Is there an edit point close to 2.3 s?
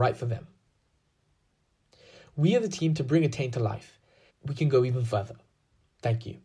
no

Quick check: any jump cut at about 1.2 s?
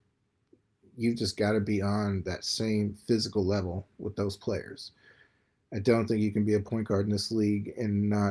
no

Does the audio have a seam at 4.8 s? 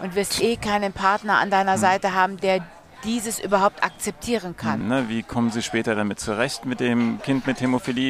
yes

